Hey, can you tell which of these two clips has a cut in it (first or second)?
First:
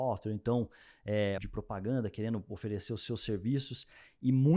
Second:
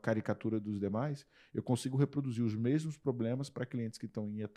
first